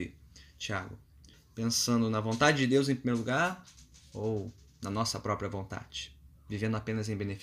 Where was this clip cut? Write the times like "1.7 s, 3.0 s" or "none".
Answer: 1.3 s